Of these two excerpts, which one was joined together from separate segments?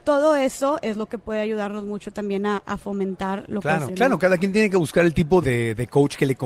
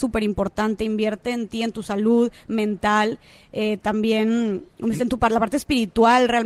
first; 2 cuts; at 3.9 s, 5.4 s

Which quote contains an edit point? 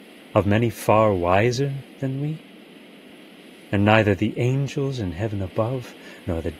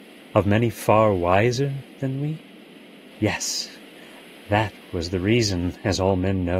second; 1 cut; at 3.1 s

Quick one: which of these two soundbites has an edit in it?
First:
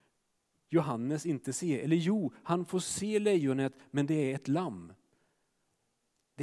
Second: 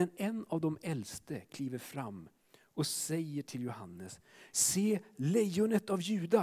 second; 1 cut; at 4.5 s

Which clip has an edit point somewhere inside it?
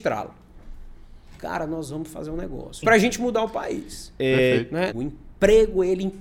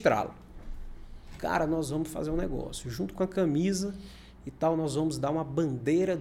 first; 2 cuts; at 2.8 s, 4.9 s

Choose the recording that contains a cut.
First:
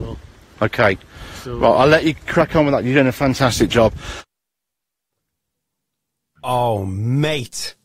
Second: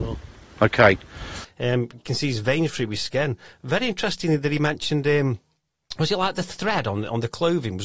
second; 1 cut; at 1.4 s

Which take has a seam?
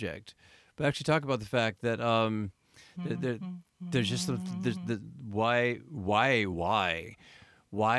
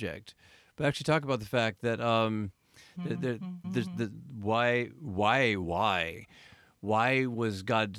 second; 1 cut; at 3.6 s

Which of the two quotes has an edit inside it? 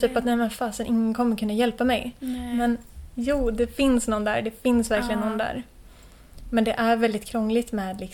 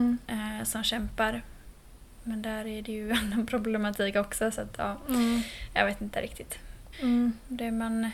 second; 1 cut; at 6.9 s

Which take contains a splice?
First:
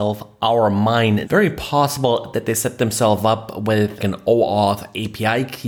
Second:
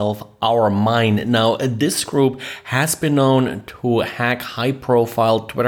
first; 2 cuts; at 1.2 s, 4.0 s

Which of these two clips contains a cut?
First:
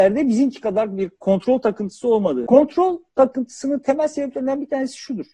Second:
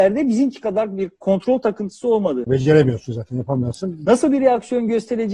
second; 2 cuts; at 2.4 s, 4.1 s

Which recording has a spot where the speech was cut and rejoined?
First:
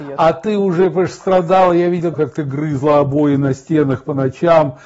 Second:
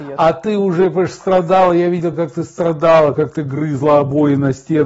first; 1 cut; at 2.1 s

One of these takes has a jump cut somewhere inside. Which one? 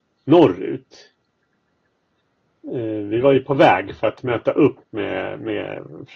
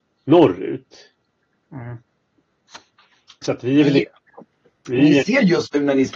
second; 1 cut; at 1.6 s

